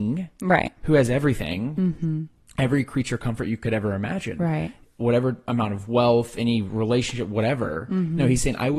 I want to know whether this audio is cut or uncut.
uncut